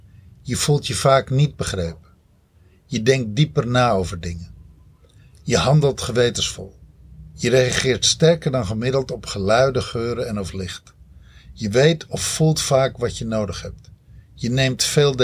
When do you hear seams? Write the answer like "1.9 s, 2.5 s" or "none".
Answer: none